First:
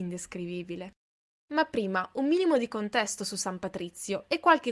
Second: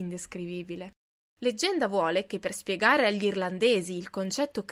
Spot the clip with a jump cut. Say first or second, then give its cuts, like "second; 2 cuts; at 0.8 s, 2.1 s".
second; 1 cut; at 1.3 s